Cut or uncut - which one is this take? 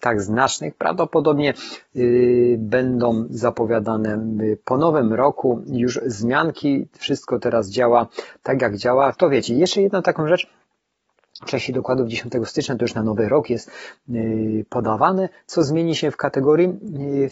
cut